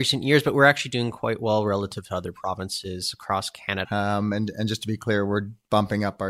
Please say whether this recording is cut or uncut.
cut